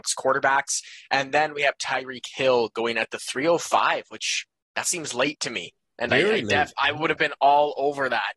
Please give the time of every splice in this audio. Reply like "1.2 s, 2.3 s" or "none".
none

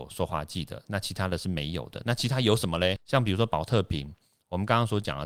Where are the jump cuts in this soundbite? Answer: none

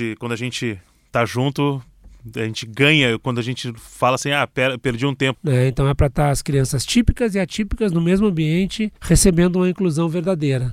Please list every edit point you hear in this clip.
5.3 s, 9.0 s

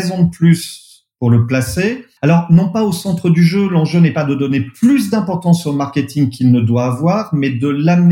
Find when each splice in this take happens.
none

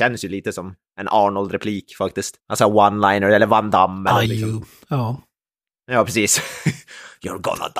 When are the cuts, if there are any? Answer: 2.4 s, 4.3 s

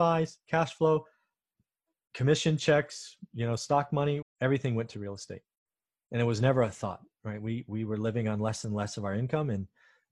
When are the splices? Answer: 4.2 s

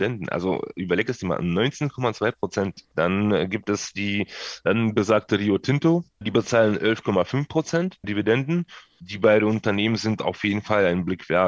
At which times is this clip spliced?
2.9 s

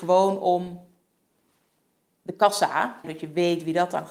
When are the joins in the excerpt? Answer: 3.0 s

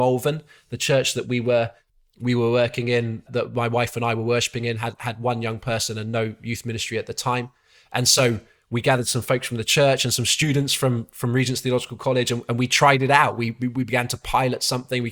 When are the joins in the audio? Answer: 3.3 s

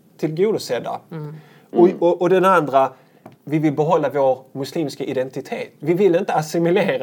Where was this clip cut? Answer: 3.3 s

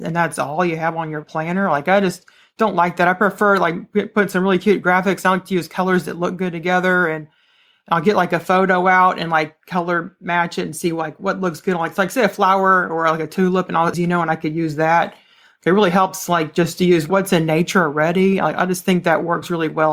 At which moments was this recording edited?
13.9 s

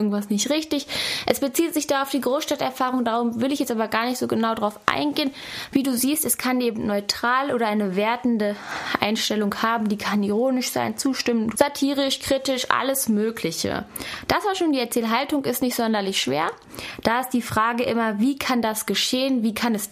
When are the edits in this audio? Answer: 11.5 s, 17.0 s

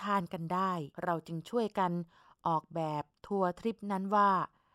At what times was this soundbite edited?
0.9 s

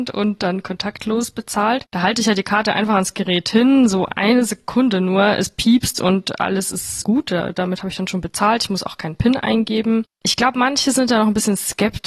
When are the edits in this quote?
7.0 s

